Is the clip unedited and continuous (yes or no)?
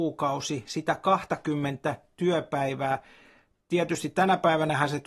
yes